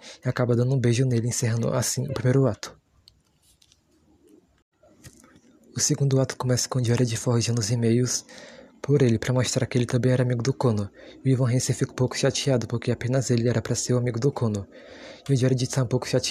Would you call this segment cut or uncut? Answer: cut